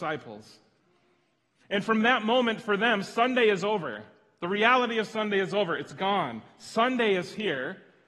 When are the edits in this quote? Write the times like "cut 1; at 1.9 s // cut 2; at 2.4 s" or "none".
none